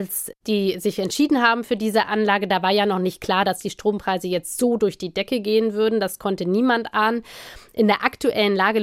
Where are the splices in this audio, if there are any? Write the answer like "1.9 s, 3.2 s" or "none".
none